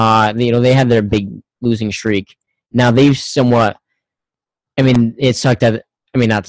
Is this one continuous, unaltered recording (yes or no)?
yes